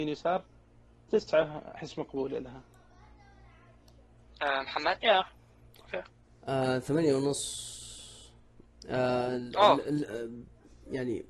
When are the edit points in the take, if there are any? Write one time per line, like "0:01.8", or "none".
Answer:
none